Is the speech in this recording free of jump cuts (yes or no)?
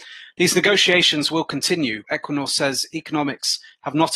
no